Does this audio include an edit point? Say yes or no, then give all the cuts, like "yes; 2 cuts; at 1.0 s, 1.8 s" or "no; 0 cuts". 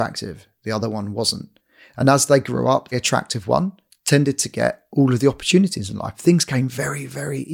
yes; 1 cut; at 2.9 s